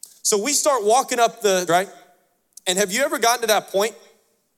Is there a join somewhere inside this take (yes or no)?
yes